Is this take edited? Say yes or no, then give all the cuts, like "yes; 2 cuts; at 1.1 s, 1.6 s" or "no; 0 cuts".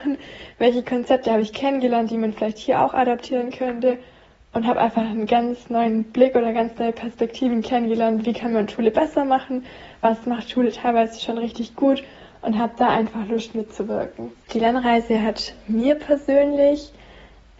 yes; 1 cut; at 14.4 s